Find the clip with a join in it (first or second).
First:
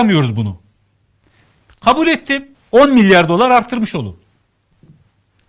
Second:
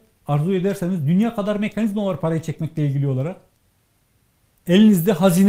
first